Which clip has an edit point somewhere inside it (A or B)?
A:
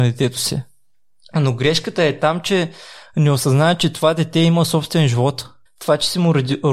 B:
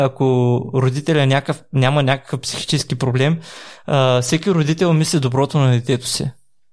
A